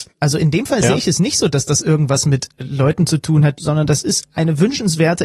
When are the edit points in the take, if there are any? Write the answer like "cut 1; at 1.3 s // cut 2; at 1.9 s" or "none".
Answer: cut 1; at 3.5 s